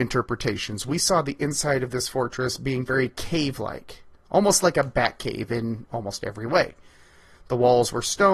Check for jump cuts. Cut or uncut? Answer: uncut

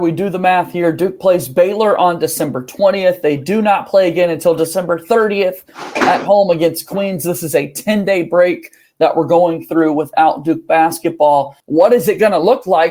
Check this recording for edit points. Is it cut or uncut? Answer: cut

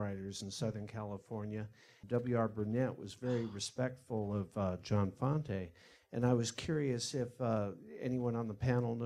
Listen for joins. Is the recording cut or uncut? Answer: cut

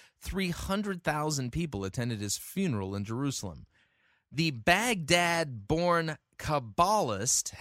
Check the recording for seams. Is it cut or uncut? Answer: uncut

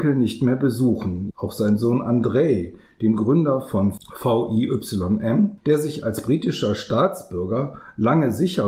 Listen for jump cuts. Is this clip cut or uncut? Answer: cut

